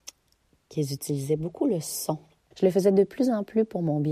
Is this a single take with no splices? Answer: no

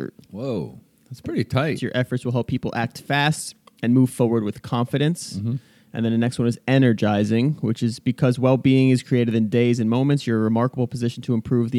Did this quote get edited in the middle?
yes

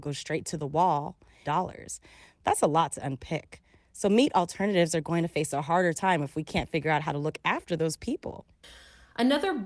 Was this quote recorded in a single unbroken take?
no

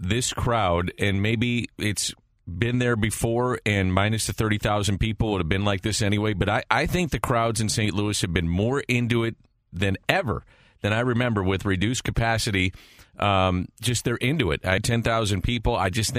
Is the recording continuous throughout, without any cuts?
no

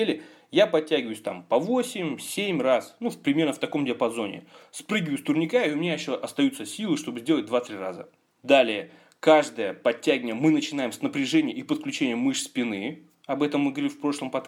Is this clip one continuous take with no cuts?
yes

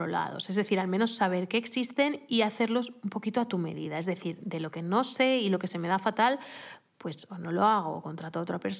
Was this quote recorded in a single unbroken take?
yes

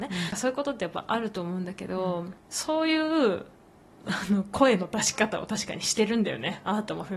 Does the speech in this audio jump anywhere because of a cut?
no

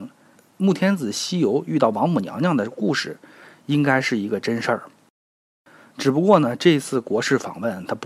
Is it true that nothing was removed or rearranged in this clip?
yes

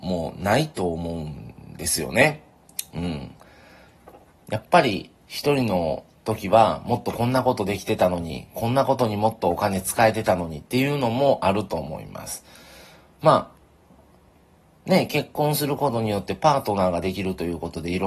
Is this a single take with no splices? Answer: yes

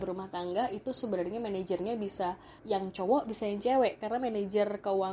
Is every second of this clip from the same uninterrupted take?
no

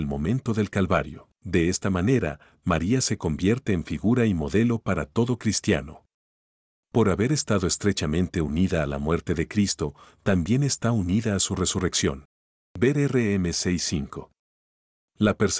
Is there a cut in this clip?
yes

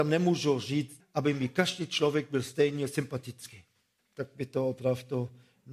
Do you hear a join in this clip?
yes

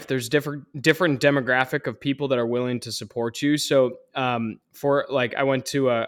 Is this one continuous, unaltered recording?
yes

